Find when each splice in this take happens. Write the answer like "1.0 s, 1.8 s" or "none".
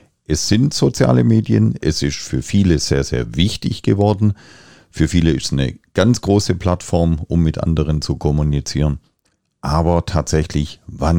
none